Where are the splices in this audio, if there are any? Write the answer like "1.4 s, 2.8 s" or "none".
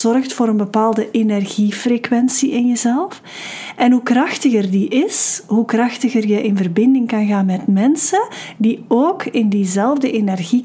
none